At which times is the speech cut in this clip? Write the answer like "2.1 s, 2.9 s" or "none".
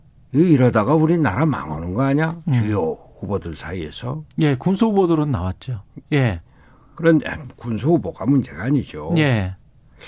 2.4 s